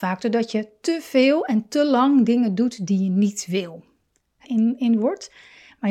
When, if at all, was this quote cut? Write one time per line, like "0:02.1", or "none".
0:04.4